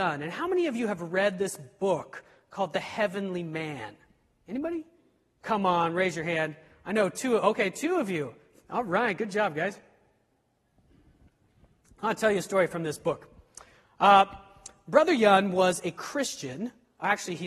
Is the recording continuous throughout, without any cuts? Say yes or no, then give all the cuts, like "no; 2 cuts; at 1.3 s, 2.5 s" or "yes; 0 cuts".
yes; 0 cuts